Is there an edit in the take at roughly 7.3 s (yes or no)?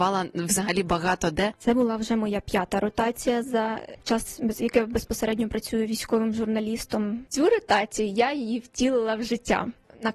yes